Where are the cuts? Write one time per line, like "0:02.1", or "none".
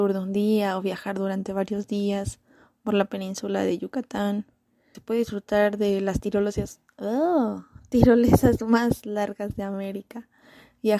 0:04.9